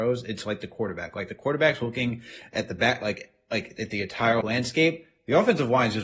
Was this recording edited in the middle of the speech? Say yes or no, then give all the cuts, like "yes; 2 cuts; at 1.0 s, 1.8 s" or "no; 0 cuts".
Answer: yes; 1 cut; at 4.4 s